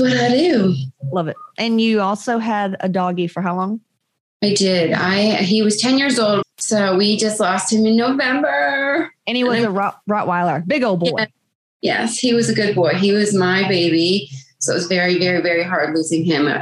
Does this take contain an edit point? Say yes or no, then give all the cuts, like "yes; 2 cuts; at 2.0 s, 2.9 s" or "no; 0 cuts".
yes; 1 cut; at 6.4 s